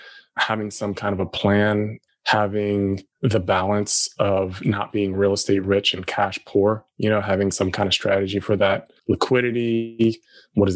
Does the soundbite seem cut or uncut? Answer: cut